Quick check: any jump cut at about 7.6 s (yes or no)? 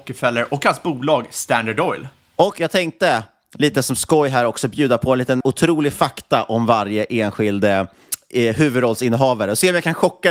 no